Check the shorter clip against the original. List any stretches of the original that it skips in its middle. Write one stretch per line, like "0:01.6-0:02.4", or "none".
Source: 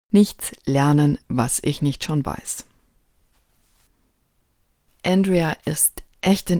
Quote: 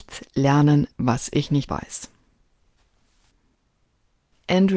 0:02.0-0:02.2

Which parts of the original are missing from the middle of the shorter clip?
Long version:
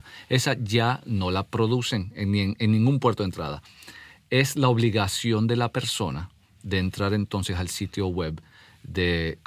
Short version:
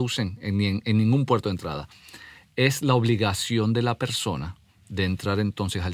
none

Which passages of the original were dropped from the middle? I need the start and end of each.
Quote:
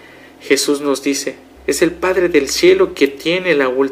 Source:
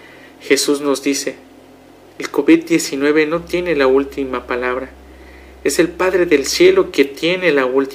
0:01.6-0:05.5

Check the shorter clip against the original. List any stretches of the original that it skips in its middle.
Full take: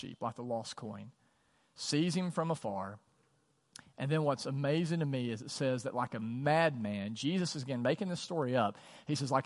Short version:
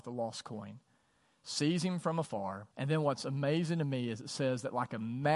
0:03.0-0:03.9

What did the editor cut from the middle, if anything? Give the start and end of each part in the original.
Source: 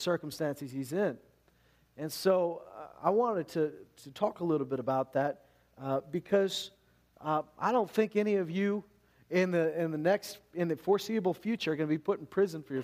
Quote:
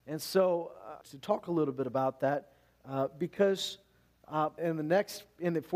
0:02.9-0:03.9
0:07.5-0:09.7

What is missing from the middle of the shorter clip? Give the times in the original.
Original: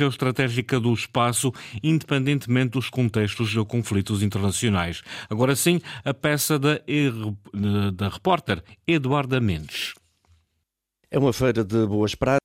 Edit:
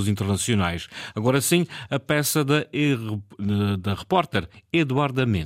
none

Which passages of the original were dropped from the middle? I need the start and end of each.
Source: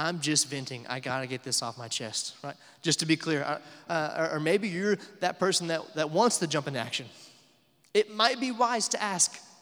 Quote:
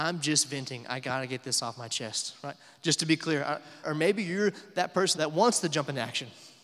0:03.8-0:04.3
0:05.6-0:05.9

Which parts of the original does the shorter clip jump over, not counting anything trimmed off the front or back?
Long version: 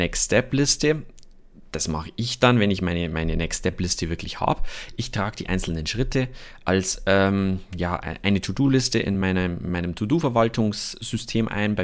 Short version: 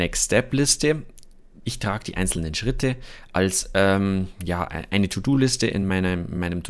0:01.6-0:05.0

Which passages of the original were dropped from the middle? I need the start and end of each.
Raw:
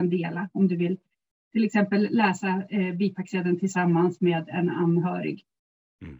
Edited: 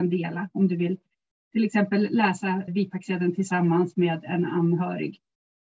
0:02.7-0:02.9

